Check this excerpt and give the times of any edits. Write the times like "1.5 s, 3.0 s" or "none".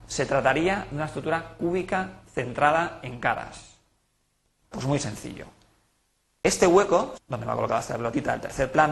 4.7 s, 7.2 s